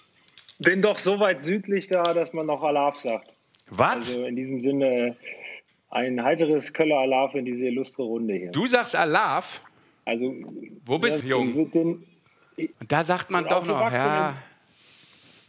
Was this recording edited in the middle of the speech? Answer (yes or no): yes